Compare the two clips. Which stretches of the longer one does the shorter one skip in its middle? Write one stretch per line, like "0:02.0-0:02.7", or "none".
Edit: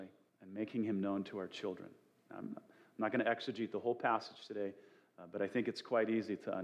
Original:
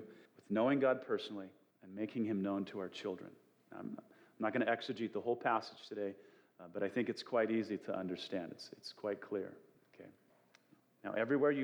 none